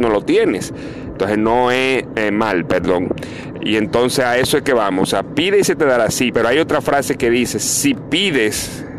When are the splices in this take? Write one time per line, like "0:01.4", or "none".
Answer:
0:01.1
0:03.5
0:06.3